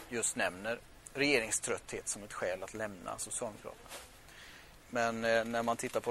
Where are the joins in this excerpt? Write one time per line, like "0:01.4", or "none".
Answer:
0:04.7